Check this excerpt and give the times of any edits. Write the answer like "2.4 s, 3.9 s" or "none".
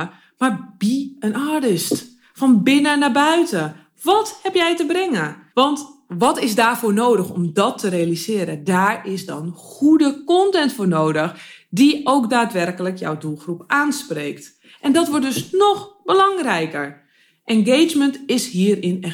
5.5 s